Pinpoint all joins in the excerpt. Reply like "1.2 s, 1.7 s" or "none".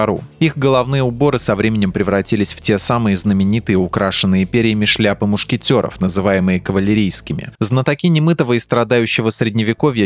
7.6 s